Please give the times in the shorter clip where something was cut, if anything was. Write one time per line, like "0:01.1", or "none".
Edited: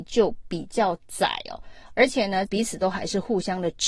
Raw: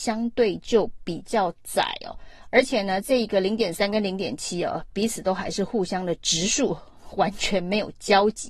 0:02.5